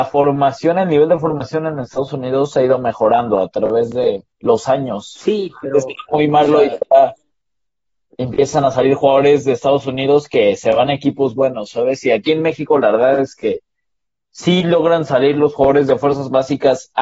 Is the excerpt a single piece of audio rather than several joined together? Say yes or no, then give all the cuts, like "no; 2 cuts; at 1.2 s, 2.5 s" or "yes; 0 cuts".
no; 1 cut; at 4.3 s